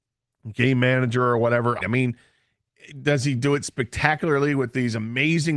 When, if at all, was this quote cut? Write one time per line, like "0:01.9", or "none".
0:01.8